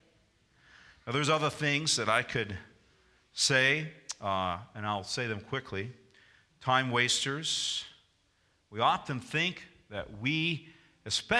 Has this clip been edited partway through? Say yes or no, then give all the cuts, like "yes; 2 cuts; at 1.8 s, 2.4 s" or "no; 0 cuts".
no; 0 cuts